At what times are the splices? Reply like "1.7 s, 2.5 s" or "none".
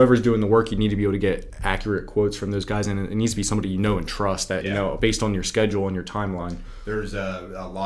4.6 s